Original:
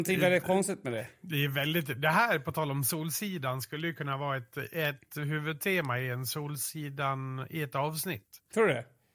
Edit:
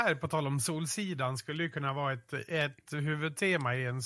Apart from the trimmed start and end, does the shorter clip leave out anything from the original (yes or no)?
no